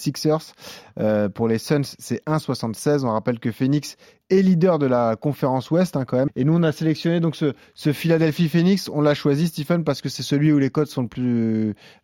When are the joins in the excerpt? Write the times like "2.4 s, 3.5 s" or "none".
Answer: 6.3 s